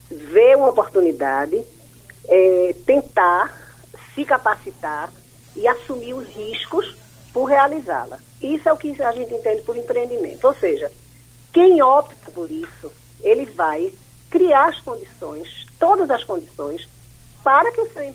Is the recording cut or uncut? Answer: uncut